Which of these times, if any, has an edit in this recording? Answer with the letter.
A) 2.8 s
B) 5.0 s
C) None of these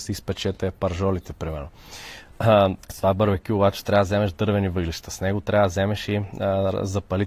A